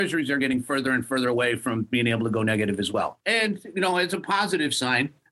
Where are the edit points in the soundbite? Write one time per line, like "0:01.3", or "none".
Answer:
none